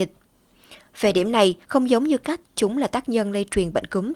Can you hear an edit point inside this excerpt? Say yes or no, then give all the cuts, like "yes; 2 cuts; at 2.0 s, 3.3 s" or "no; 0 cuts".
yes; 1 cut; at 1.6 s